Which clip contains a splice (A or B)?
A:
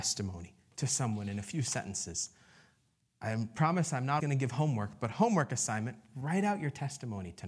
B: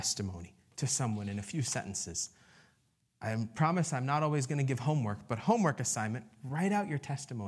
A